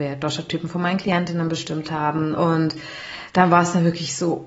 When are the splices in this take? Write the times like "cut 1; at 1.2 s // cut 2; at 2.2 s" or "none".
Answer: cut 1; at 2.4 s